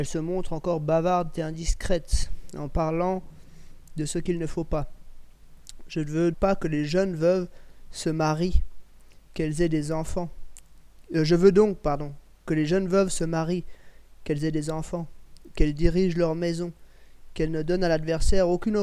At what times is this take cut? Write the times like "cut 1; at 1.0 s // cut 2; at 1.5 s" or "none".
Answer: cut 1; at 6.3 s